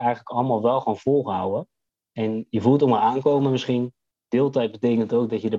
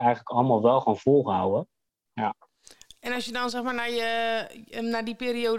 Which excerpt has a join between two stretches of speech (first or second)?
second